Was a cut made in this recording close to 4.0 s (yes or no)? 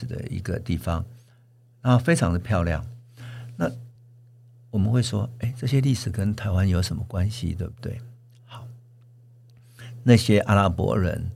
no